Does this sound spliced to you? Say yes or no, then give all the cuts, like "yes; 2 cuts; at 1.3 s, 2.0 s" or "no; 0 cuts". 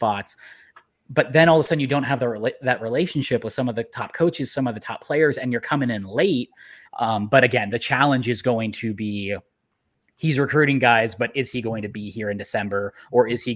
yes; 1 cut; at 6.8 s